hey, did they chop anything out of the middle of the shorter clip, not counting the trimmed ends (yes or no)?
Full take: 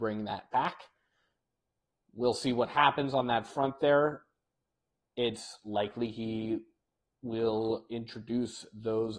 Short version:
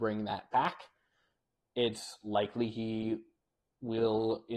yes